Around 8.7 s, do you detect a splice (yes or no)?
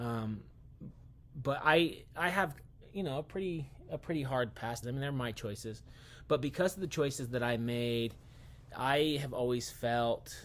yes